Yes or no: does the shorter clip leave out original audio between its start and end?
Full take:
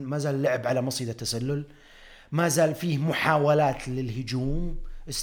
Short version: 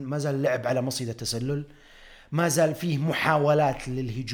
no